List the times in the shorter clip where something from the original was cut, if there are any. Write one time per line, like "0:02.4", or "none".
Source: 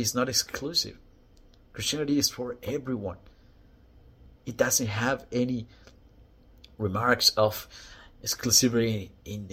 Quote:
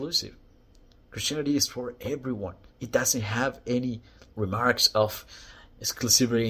0:02.7
0:04.3